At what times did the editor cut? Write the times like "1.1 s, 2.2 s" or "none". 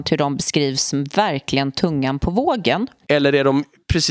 3.0 s